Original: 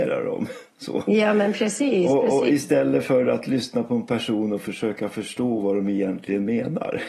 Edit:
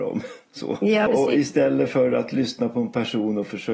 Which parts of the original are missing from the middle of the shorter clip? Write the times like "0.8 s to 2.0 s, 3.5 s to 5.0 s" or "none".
1.3 s to 2.2 s